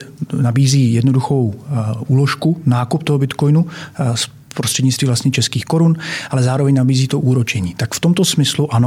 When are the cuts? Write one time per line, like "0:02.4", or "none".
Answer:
none